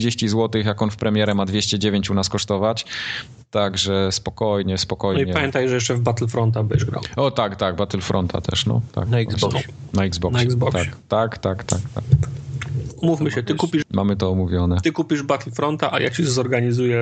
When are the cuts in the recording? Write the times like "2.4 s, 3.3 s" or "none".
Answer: 13.8 s